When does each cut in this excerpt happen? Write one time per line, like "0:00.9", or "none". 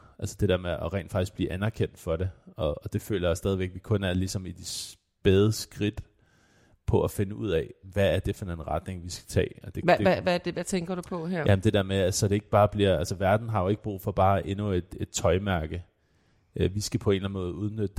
none